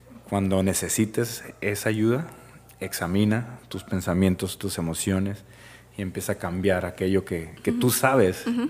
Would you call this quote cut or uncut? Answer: uncut